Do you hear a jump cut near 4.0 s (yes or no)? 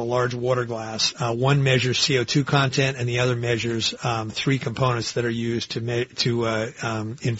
no